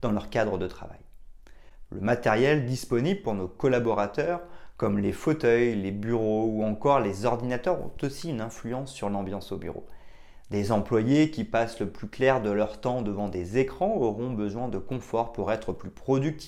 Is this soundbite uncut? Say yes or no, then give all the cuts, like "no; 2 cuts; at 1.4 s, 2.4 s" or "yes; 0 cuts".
no; 1 cut; at 1.9 s